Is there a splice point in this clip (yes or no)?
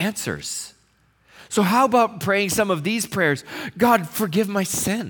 no